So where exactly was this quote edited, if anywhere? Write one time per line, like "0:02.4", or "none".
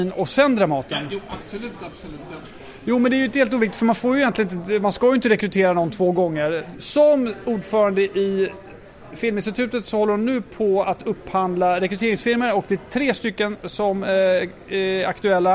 0:06.7